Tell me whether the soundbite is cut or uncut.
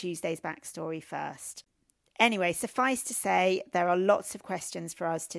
uncut